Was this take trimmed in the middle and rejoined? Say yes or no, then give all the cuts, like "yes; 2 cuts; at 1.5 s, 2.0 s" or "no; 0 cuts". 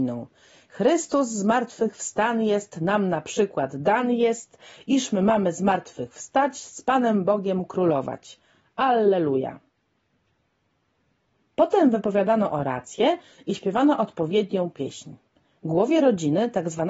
no; 0 cuts